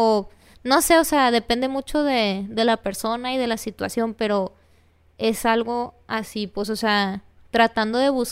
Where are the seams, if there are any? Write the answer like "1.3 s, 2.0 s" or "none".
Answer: none